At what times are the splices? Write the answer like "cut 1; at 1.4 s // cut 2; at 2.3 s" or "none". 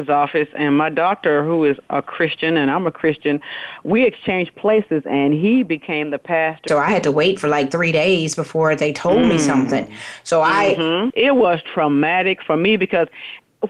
cut 1; at 6.7 s // cut 2; at 11.1 s